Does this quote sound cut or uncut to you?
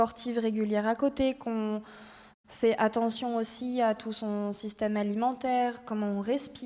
uncut